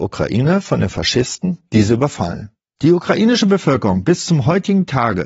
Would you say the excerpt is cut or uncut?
uncut